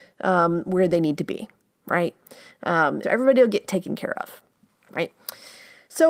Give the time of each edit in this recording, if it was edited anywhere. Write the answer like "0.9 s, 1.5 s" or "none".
3.0 s